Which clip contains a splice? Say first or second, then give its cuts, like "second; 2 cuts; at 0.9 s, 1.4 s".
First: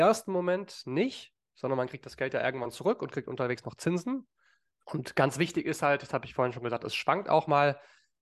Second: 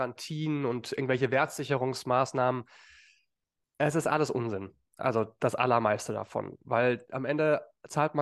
first; 1 cut; at 4.8 s